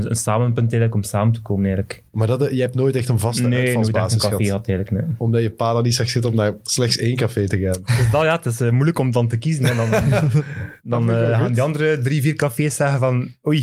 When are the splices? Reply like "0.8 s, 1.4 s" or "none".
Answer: none